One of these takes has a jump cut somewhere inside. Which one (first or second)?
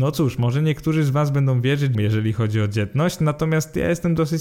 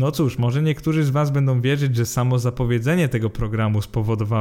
first